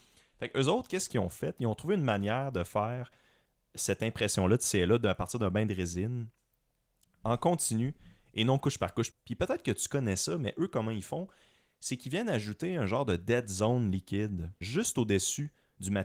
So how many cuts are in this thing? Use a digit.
2